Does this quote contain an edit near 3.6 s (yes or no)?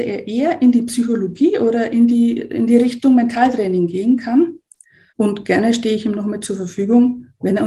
no